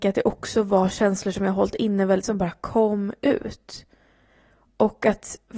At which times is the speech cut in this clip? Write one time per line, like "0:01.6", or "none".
0:02.2